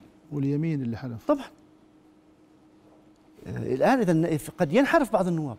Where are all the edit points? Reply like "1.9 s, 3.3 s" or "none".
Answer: none

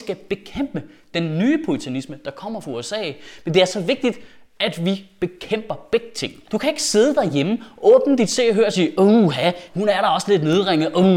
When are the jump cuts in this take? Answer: 6.4 s, 9.7 s

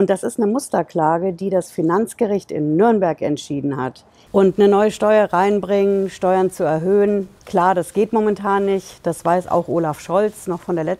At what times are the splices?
4.3 s

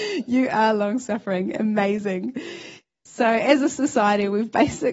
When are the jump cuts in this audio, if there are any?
3.0 s

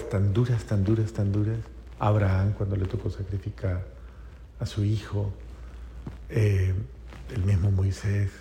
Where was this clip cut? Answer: none

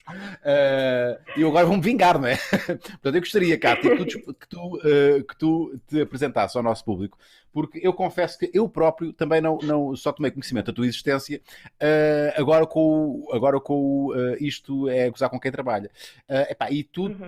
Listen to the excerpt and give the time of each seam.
none

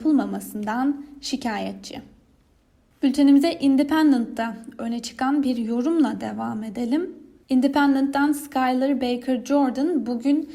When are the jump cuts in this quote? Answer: none

